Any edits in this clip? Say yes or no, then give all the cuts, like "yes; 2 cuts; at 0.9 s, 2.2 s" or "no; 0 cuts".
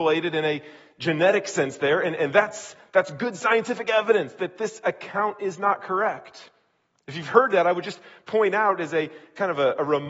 no; 0 cuts